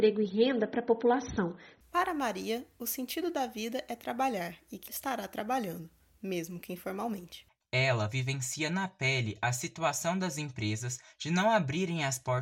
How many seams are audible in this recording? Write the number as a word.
one